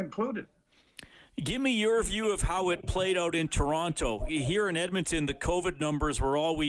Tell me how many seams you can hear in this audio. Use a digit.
0